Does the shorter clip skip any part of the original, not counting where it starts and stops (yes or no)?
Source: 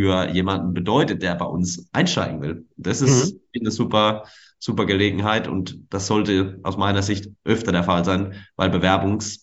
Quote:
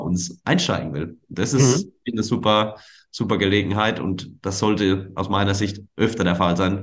no